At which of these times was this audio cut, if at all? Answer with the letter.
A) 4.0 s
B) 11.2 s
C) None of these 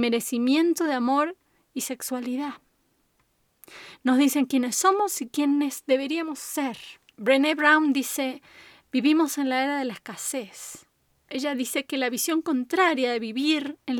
B